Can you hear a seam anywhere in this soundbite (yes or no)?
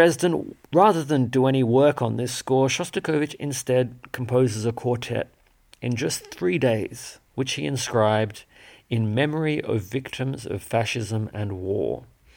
yes